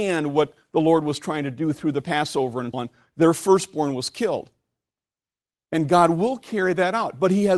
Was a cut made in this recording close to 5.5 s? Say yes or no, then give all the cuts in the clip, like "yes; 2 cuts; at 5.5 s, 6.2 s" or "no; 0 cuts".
yes; 2 cuts; at 2.7 s, 5.5 s